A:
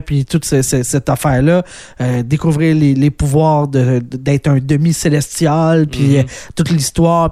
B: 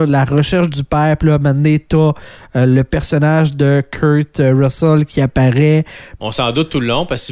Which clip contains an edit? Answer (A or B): B